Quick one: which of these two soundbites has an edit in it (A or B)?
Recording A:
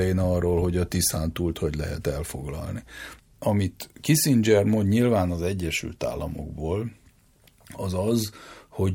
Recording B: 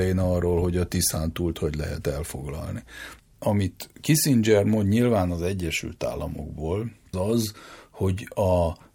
B